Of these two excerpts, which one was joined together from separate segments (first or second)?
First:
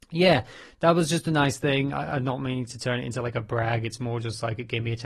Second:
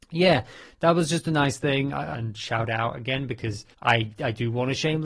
second